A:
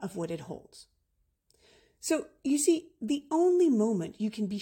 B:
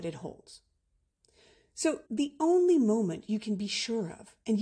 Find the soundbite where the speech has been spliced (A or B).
B